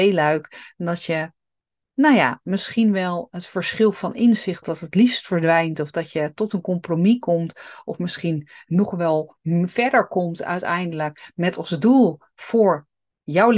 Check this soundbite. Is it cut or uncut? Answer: cut